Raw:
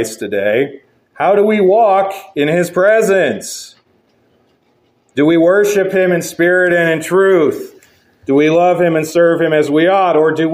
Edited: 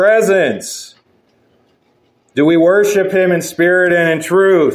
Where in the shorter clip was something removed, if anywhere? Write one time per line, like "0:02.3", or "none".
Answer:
none